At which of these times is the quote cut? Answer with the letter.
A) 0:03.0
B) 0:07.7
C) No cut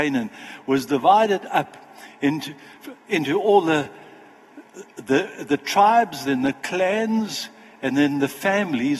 C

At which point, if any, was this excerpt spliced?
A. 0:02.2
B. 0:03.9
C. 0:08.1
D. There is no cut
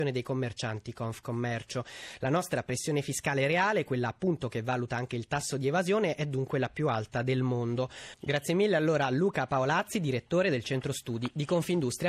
C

